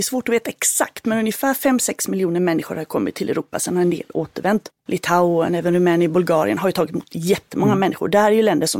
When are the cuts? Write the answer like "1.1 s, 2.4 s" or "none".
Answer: 4.8 s